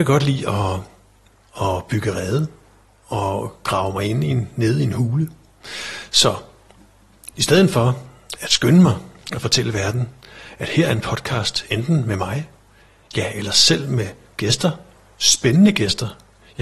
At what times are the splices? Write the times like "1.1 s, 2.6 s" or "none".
none